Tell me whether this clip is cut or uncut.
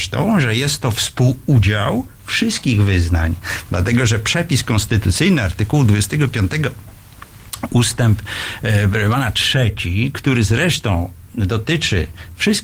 cut